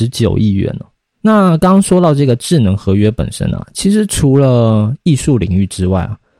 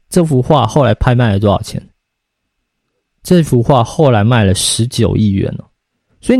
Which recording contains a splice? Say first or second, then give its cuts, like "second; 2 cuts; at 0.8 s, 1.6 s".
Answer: first; 1 cut; at 1.2 s